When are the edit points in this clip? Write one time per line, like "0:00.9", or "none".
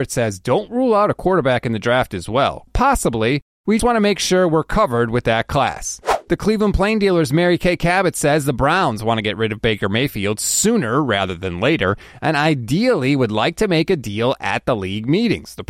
0:02.7
0:03.8